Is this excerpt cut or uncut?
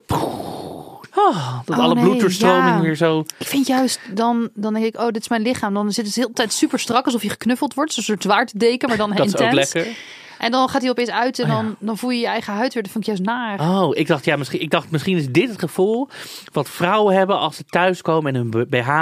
cut